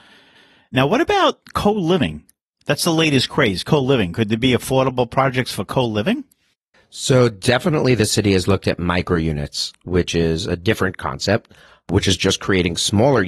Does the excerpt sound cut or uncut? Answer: uncut